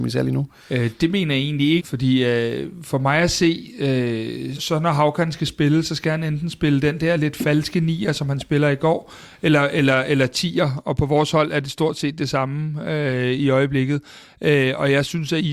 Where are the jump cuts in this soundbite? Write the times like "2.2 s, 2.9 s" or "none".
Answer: 1.8 s, 4.6 s